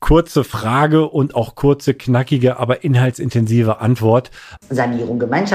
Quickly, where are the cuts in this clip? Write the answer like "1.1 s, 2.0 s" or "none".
4.6 s

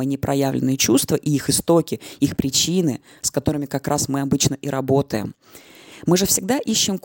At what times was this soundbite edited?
none

